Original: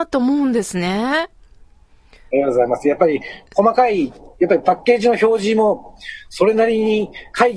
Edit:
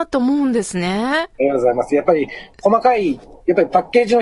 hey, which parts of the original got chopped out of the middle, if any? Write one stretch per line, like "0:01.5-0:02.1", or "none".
0:01.3-0:02.3